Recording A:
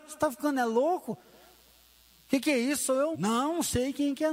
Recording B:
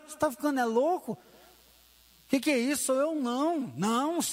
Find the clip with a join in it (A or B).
A